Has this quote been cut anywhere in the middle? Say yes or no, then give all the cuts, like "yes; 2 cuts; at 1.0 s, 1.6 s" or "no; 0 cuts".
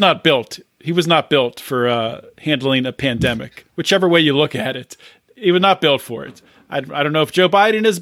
no; 0 cuts